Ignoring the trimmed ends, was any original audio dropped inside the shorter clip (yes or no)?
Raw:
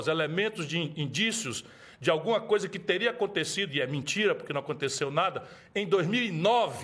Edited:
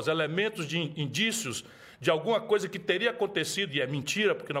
no